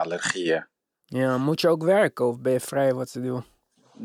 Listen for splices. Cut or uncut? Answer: uncut